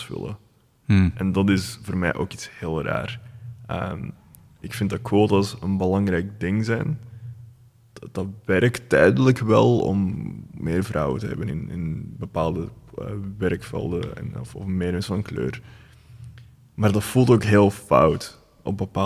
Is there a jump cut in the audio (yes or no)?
no